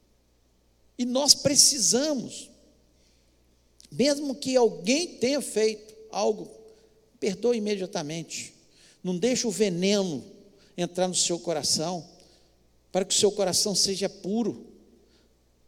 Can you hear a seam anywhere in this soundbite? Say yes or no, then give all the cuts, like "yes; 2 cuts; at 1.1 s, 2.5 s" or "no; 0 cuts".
no; 0 cuts